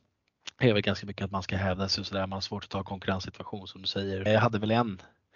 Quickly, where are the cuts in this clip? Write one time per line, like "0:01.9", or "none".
0:04.3